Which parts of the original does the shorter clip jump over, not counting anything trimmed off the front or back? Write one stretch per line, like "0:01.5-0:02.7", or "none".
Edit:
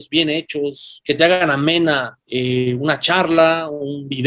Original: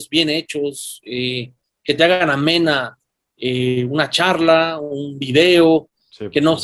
0:01.0-0:01.8
0:03.0-0:03.3